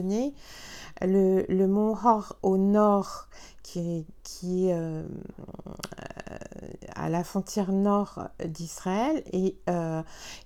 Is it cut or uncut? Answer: uncut